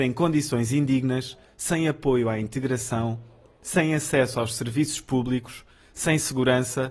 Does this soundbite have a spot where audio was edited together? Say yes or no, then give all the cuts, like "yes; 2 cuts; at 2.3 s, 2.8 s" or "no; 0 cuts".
no; 0 cuts